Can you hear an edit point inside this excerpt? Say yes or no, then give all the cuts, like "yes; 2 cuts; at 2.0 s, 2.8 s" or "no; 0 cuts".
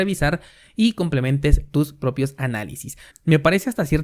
yes; 1 cut; at 3.1 s